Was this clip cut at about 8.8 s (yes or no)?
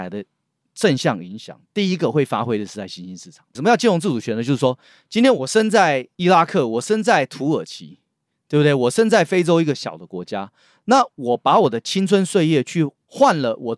no